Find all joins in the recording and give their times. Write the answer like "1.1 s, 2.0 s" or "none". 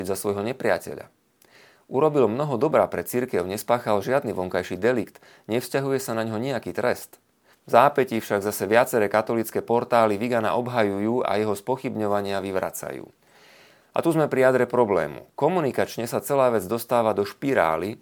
7.5 s

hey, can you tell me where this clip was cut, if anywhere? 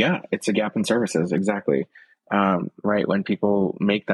none

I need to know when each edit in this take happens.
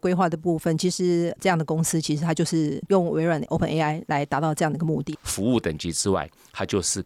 5.1 s

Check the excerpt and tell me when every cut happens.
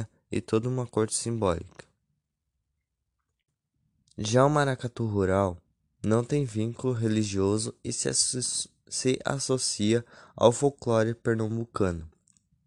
none

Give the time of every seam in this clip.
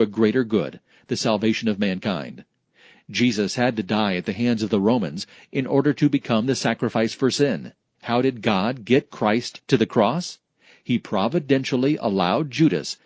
7.8 s

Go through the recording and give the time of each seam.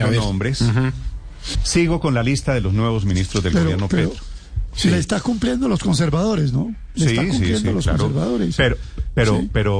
1.5 s

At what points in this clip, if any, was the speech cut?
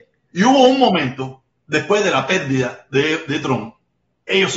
none

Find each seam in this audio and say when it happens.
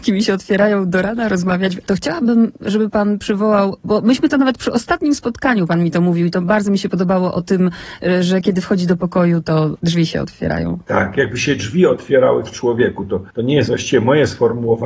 1.8 s

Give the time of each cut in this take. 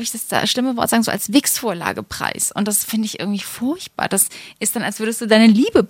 none

